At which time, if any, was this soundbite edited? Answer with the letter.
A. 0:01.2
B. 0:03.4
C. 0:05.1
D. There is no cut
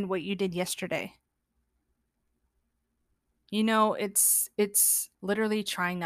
C